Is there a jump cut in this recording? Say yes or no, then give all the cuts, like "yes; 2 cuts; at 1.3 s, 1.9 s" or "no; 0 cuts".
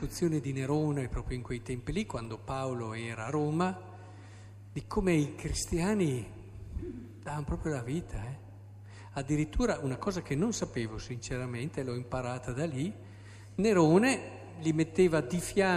no; 0 cuts